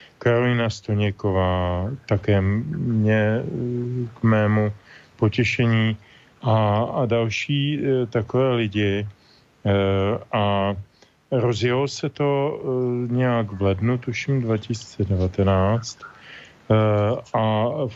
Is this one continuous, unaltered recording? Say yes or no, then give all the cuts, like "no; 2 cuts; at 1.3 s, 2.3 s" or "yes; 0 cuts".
yes; 0 cuts